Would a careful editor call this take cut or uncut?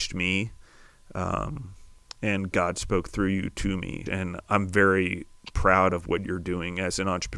cut